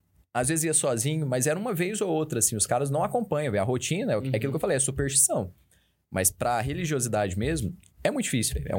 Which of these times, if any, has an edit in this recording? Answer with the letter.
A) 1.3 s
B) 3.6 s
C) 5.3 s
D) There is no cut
D